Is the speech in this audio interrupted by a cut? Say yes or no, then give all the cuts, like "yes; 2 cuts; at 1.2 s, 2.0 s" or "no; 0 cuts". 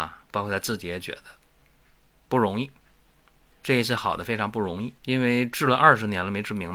yes; 1 cut; at 5.0 s